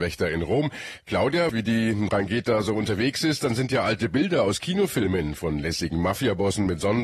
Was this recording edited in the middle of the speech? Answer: yes; 1 cut; at 1.5 s

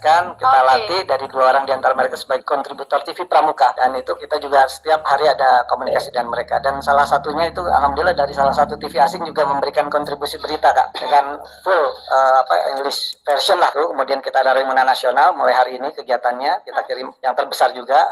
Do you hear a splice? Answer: no; 0 cuts

